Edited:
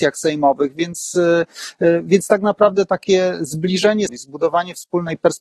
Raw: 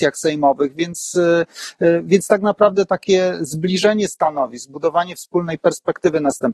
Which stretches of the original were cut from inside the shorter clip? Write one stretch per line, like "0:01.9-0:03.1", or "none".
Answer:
0:04.1-0:04.5